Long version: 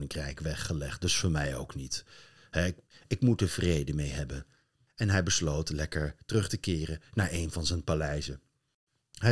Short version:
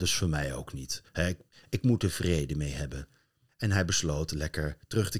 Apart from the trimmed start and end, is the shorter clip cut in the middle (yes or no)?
yes